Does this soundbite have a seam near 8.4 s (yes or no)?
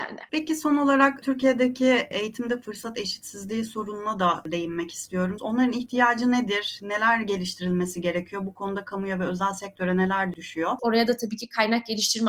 no